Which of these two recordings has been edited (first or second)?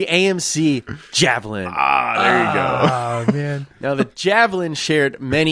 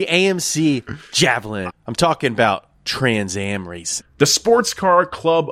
second